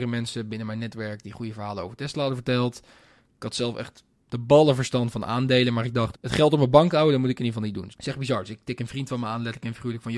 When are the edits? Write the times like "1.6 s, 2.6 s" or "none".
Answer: 6.1 s, 7.9 s